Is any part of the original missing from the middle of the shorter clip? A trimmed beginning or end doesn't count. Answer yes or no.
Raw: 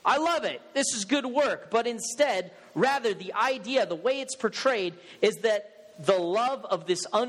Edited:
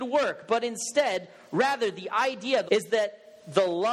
yes